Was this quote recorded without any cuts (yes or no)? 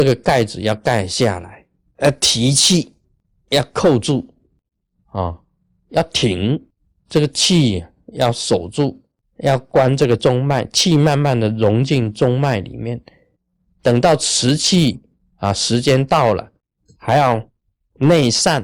yes